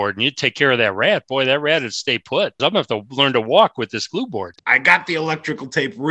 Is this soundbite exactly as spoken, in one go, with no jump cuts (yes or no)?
no